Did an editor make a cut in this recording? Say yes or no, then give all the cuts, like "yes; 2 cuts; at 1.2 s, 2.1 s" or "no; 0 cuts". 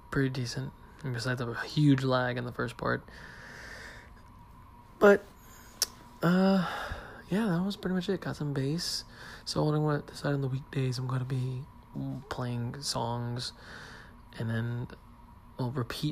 no; 0 cuts